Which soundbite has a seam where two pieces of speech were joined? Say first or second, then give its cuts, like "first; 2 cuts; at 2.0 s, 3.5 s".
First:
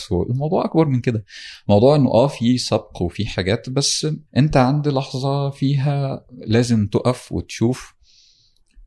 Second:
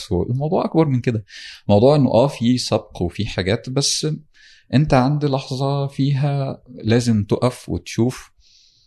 first; 1 cut; at 4.3 s